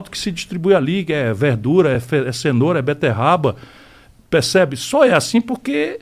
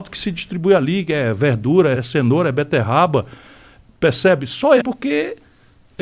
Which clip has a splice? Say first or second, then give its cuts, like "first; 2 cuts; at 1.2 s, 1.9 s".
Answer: second; 2 cuts; at 1.9 s, 4.8 s